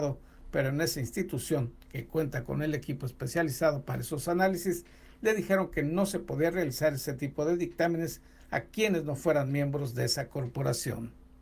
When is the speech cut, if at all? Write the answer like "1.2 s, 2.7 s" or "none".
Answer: none